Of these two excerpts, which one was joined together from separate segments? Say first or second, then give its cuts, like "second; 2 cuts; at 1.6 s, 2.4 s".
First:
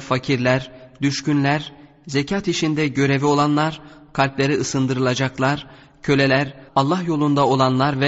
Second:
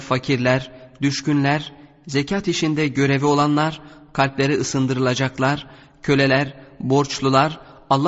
first; 1 cut; at 6.7 s